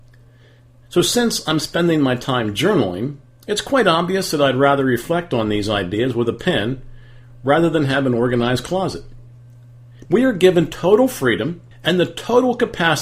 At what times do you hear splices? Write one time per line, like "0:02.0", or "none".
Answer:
0:10.1
0:11.7